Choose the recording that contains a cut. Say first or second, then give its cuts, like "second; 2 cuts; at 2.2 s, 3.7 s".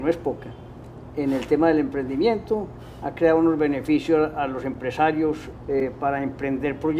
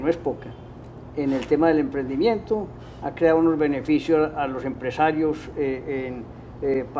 first; 1 cut; at 5.5 s